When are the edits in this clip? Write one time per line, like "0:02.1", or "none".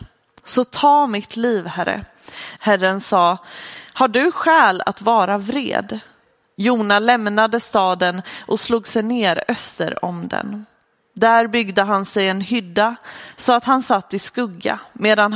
0:02.6